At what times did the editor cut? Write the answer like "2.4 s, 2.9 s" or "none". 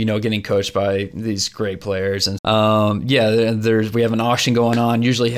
2.4 s